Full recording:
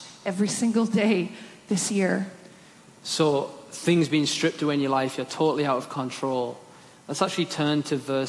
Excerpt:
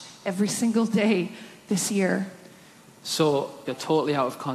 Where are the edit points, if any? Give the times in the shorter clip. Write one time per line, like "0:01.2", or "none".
0:03.7